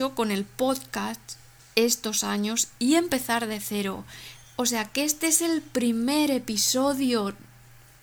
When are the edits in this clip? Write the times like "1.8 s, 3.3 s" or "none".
none